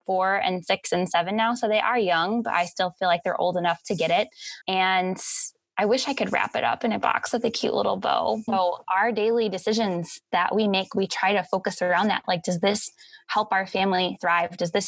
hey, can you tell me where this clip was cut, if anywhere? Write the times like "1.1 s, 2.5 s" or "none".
4.6 s, 8.5 s